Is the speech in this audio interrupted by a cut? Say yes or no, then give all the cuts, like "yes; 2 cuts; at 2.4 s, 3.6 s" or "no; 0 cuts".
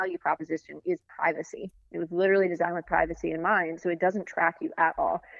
no; 0 cuts